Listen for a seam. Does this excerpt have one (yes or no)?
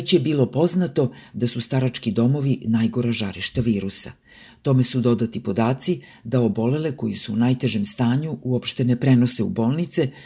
no